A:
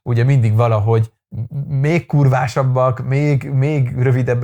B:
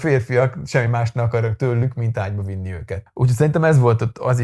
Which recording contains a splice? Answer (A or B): B